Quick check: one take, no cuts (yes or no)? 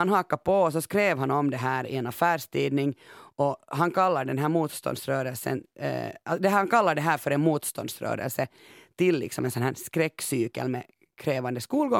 yes